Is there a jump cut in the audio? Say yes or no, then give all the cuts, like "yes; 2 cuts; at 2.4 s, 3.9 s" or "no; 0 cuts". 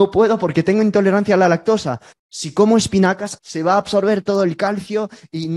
yes; 2 cuts; at 2.1 s, 3.4 s